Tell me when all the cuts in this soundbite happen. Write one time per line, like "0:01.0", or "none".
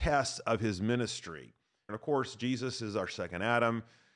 0:01.9